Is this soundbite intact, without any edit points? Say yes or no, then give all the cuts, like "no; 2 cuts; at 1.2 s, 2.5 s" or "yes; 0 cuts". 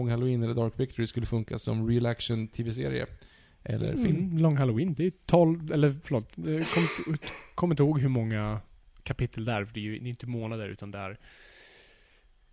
yes; 0 cuts